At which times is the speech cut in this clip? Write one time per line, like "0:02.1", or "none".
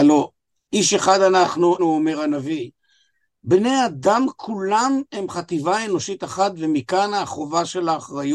0:01.8